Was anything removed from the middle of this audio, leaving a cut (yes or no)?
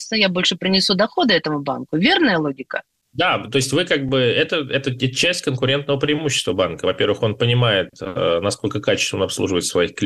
no